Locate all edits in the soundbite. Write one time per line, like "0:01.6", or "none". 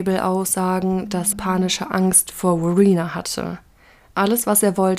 0:01.3